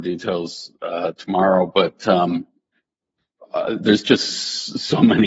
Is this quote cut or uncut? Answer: uncut